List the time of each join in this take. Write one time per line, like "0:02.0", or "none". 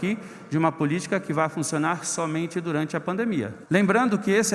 0:03.6